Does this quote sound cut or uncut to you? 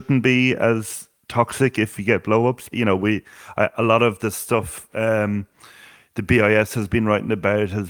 cut